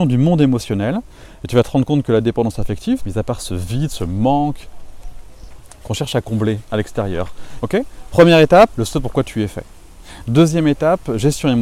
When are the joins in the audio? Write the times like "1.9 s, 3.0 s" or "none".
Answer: 3.0 s, 7.6 s, 8.7 s